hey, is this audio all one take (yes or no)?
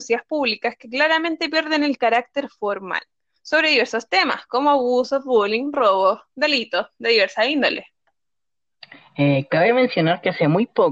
yes